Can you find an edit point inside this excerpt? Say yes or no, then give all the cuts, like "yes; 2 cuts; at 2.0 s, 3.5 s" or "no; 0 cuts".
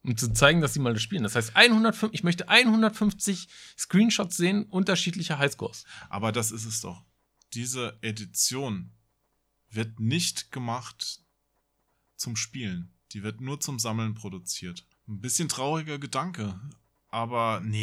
yes; 1 cut; at 14.9 s